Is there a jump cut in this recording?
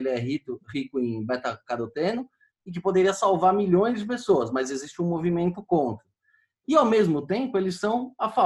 no; 0 cuts

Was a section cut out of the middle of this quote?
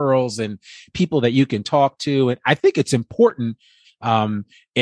yes; 1 cut; at 3.8 s

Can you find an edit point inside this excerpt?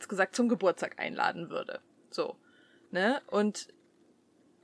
no; 0 cuts

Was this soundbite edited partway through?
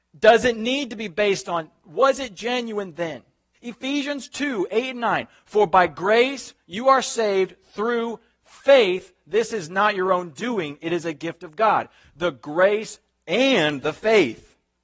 yes; 1 cut; at 3.5 s

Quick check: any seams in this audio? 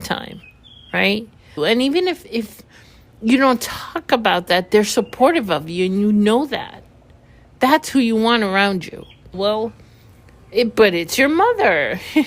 yes; 2 cuts; at 1.6 s, 9.3 s

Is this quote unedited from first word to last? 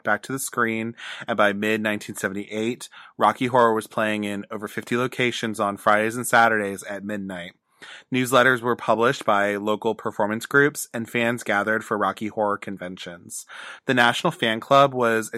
no; 1 cut; at 13.8 s

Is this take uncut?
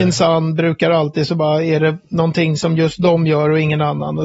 yes; 0 cuts

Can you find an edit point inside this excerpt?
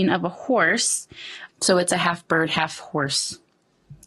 yes; 1 cut; at 1.5 s

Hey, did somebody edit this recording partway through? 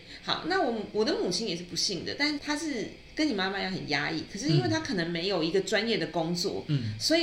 yes; 1 cut; at 2.4 s

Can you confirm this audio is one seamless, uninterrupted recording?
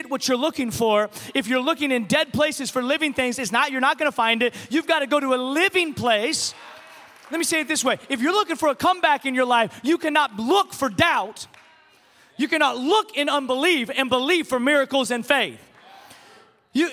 yes; 0 cuts

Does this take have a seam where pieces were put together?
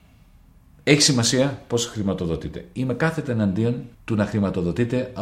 yes; 1 cut; at 3.9 s

